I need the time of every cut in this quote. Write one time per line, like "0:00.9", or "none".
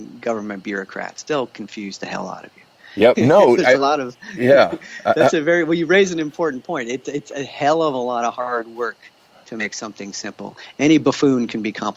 0:03.1